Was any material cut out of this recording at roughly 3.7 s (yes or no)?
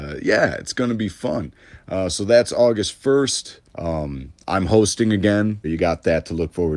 yes